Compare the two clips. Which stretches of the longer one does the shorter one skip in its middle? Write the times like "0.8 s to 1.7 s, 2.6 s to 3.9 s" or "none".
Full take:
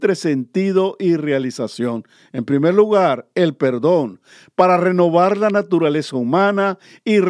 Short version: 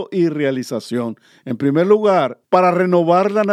3.3 s to 4.5 s